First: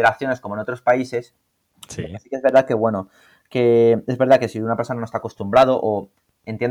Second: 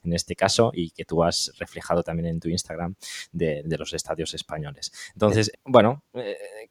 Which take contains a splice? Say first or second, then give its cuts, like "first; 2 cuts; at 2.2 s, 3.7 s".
second; 2 cuts; at 3.6 s, 5.5 s